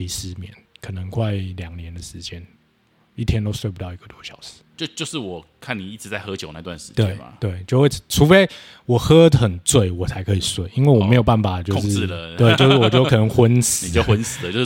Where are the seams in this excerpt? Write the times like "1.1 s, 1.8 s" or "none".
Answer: none